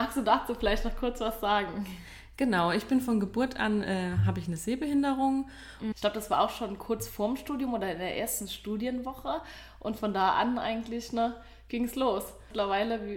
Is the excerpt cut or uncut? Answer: cut